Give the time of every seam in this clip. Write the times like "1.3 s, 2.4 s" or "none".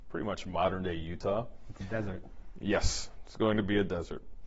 none